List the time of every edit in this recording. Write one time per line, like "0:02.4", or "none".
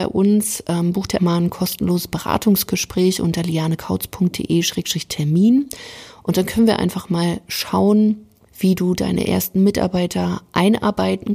0:01.2
0:08.5

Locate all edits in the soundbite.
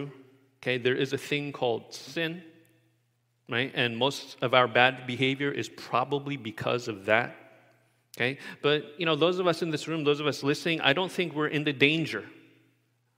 none

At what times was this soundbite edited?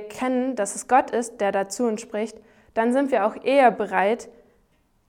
none

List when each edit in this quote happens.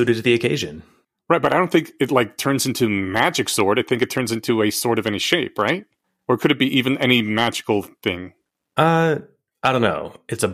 none

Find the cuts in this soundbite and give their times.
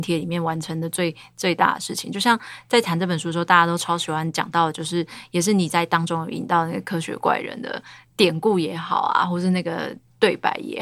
none

